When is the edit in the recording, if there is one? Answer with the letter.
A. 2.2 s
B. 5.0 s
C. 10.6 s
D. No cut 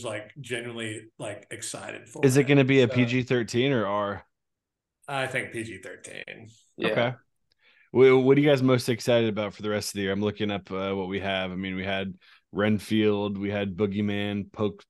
D